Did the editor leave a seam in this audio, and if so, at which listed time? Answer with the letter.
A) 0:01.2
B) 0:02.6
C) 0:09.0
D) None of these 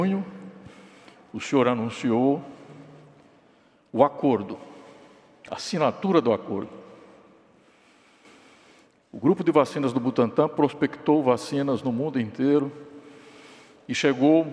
C